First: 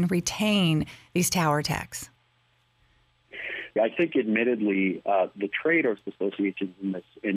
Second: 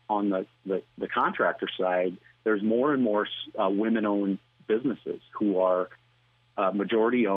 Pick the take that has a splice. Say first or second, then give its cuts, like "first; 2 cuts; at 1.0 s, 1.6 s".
first; 1 cut; at 3.8 s